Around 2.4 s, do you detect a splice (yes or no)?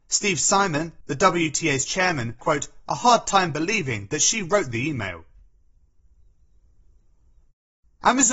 yes